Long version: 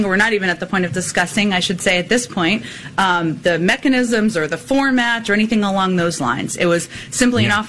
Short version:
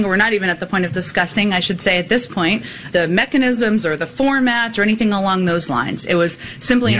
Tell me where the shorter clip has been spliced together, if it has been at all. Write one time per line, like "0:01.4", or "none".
0:02.9